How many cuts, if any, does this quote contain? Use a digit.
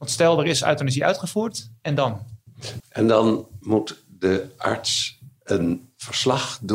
1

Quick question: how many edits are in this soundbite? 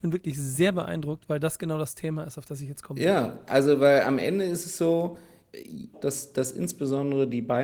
1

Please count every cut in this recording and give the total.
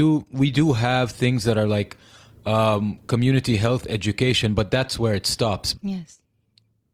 1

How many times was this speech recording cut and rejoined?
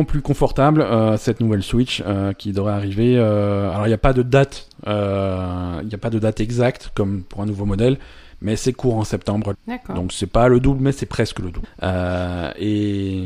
2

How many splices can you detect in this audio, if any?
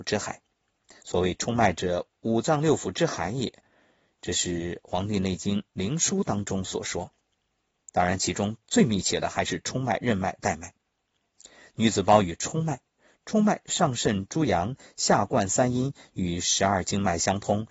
2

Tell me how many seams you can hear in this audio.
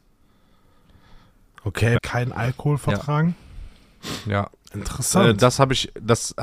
1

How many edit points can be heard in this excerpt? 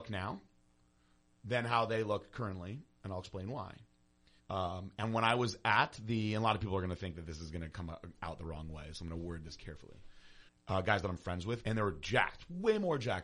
3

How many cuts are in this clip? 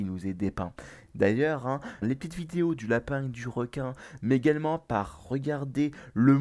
1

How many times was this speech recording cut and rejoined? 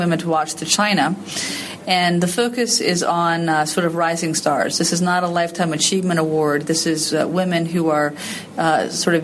1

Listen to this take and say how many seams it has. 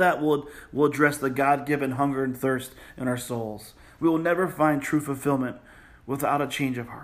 0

